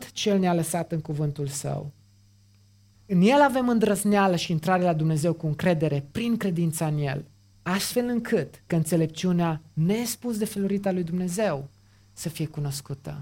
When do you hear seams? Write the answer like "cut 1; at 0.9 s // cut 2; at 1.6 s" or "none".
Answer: cut 1; at 2.9 s // cut 2; at 7.5 s // cut 3; at 8.7 s